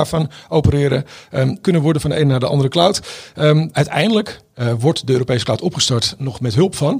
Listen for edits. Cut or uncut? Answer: cut